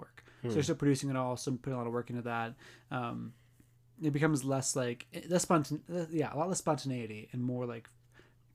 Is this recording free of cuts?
yes; 0 cuts

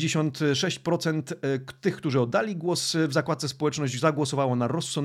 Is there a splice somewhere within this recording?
no; 0 cuts

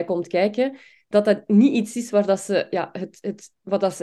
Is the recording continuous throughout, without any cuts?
yes; 0 cuts

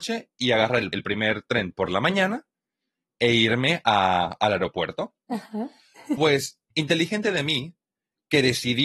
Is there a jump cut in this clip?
no; 0 cuts

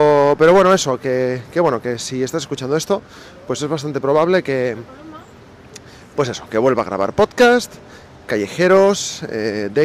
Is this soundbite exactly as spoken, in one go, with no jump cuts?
yes; 0 cuts

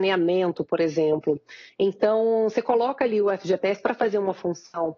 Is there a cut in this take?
no; 0 cuts

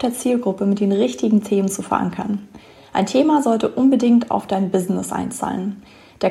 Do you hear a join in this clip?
no; 0 cuts

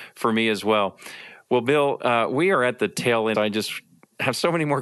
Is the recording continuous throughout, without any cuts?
no; 1 cut; at 3.3 s

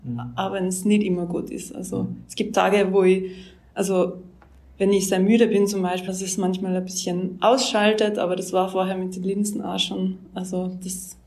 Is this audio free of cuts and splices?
no; 1 cut; at 6.1 s

